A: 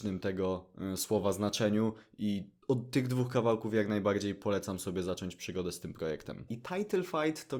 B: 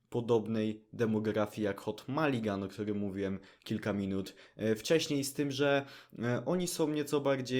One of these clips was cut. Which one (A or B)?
A